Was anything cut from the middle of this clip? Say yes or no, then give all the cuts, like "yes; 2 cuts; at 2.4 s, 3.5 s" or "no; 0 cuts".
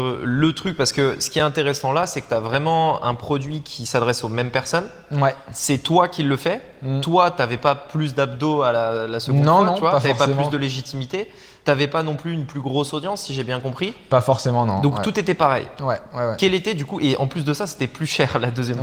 no; 0 cuts